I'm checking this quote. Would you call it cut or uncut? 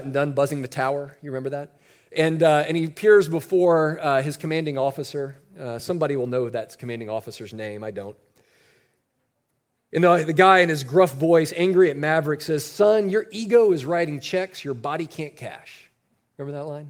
uncut